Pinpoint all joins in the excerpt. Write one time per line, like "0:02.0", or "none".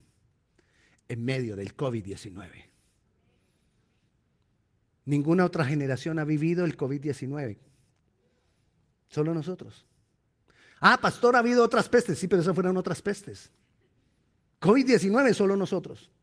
none